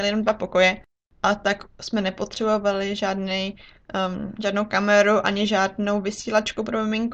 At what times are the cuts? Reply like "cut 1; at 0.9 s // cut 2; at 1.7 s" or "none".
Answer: none